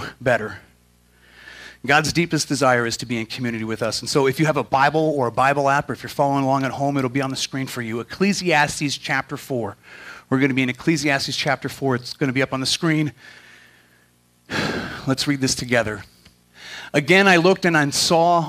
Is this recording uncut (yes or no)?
yes